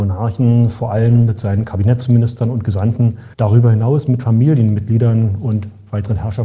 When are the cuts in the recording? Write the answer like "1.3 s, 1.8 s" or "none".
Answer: 3.3 s